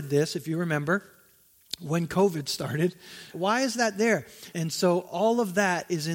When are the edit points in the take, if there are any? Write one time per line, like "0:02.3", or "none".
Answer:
0:03.3
0:04.5